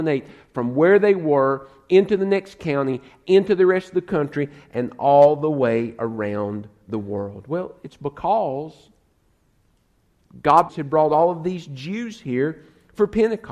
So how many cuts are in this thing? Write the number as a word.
two